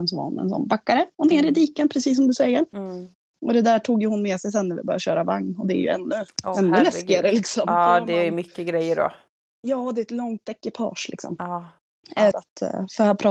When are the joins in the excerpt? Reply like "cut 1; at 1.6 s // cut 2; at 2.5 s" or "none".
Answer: cut 1; at 12.3 s